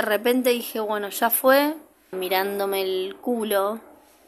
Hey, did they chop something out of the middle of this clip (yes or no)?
yes